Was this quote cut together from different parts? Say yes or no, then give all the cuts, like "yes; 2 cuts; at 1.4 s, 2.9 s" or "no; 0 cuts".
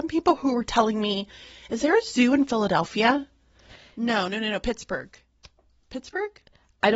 no; 0 cuts